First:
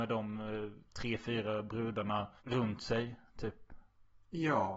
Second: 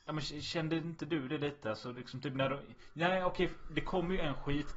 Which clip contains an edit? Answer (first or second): first